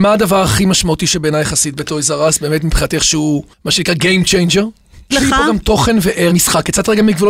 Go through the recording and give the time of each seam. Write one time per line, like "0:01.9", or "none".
0:03.5
0:05.1
0:06.3